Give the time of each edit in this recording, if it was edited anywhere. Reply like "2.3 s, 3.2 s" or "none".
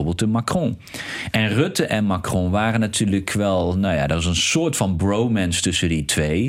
none